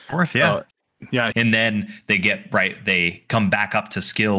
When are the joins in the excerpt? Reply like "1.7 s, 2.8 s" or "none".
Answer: 1.3 s